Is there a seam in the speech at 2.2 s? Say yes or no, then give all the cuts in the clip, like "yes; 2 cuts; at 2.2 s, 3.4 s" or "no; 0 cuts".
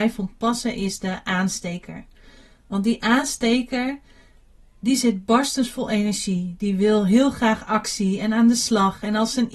no; 0 cuts